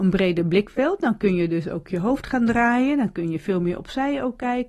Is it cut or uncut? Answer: uncut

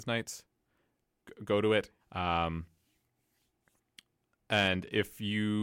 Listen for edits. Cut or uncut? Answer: cut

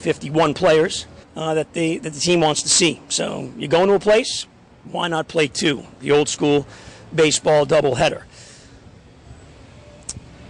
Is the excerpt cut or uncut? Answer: cut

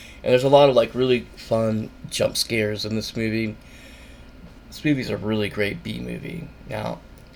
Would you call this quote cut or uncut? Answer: cut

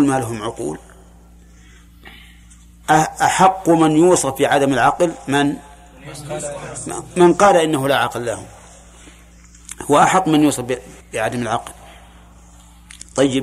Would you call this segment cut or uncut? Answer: cut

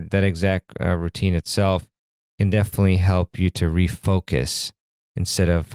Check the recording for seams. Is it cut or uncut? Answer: uncut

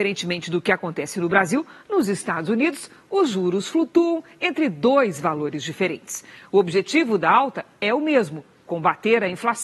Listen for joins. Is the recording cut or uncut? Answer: uncut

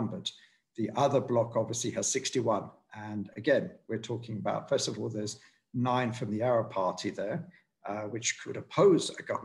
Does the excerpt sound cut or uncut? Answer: uncut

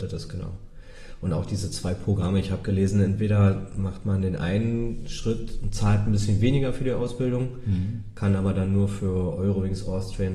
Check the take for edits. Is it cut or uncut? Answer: uncut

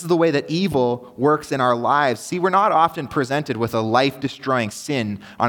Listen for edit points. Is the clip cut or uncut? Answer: uncut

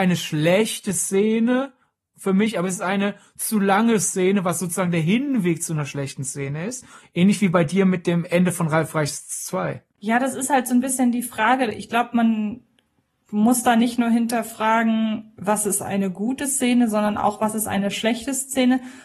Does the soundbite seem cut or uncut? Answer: uncut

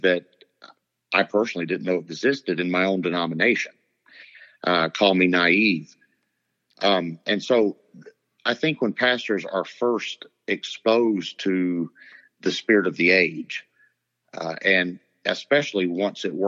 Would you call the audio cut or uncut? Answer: uncut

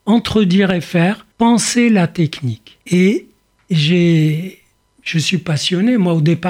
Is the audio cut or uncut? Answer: cut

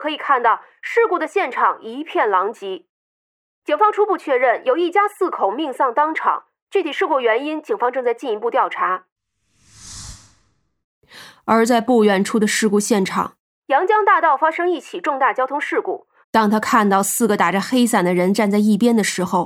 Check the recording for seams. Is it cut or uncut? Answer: cut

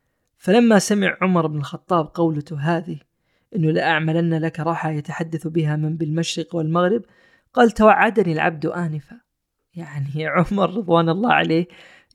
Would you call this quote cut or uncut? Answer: uncut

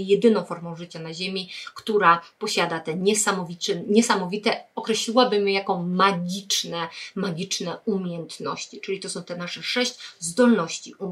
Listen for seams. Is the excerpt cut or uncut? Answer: uncut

